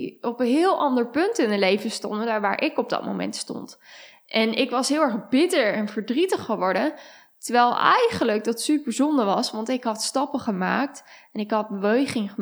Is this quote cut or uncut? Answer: uncut